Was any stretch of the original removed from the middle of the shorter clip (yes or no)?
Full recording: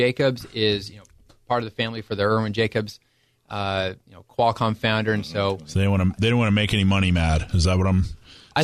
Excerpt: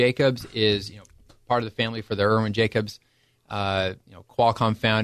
no